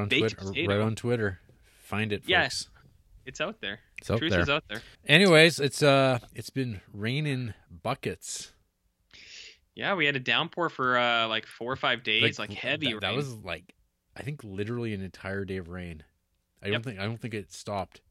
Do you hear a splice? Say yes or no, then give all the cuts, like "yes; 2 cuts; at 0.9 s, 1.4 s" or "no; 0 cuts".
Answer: yes; 1 cut; at 4.9 s